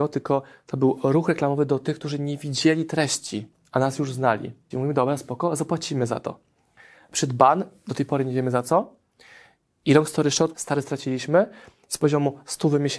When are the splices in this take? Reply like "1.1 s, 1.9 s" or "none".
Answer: 4.7 s, 10.5 s